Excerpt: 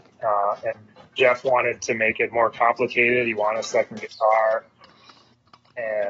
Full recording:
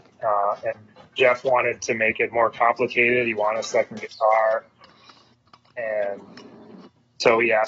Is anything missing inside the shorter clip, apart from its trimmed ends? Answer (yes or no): no